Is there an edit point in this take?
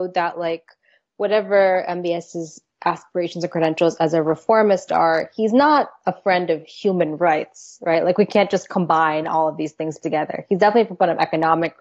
no; 0 cuts

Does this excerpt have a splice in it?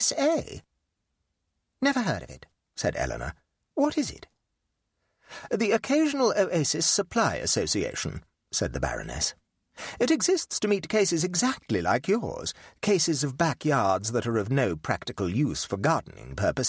no; 0 cuts

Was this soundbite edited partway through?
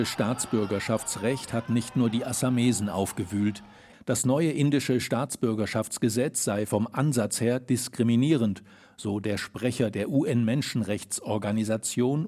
yes; 1 cut; at 3.9 s

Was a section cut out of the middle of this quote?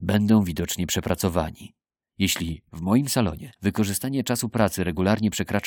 yes; 2 cuts; at 2.0 s, 3.6 s

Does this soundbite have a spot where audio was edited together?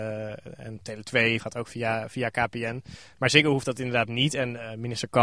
yes; 1 cut; at 1.4 s

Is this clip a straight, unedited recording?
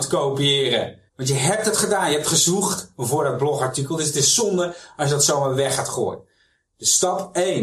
no; 1 cut; at 1.1 s

